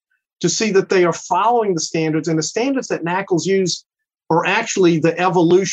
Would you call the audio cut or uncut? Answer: uncut